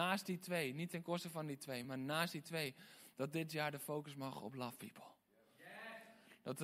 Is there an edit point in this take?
no; 0 cuts

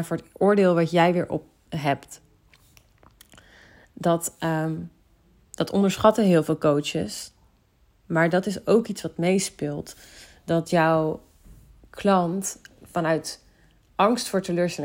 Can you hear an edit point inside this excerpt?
yes; 1 cut; at 1.7 s

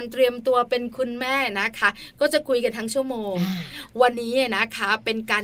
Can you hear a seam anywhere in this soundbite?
yes; 1 cut; at 4.1 s

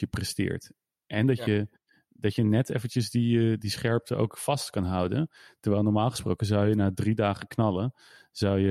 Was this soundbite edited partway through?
no; 0 cuts

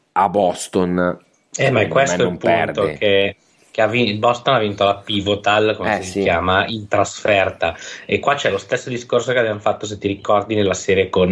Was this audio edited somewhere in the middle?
no; 0 cuts

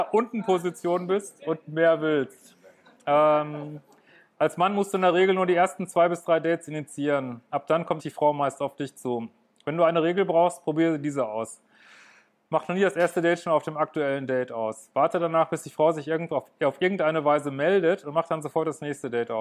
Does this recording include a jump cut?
yes; 1 cut; at 8.0 s

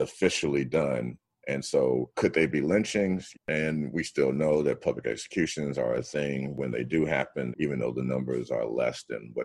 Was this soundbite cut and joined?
yes; 2 cuts; at 3.3 s, 7.5 s

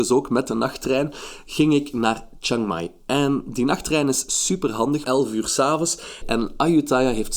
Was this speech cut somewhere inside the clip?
yes; 2 cuts; at 5.0 s, 6.2 s

